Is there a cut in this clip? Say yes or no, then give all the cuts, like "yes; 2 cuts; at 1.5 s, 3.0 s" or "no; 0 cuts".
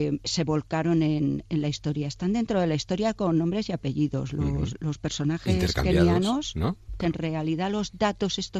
yes; 1 cut; at 7.0 s